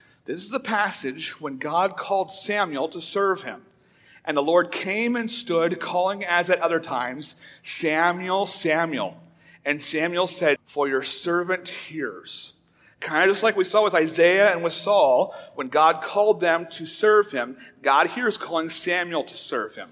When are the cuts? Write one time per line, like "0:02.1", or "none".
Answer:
0:10.6